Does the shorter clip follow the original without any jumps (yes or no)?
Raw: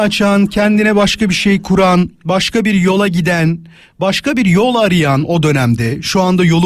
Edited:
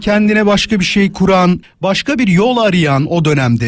no